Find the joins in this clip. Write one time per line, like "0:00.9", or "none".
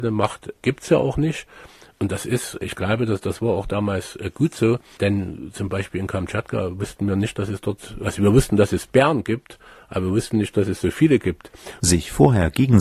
0:11.8